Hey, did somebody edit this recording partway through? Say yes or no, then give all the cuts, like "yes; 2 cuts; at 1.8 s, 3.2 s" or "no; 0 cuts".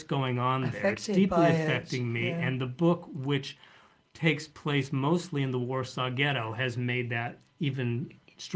no; 0 cuts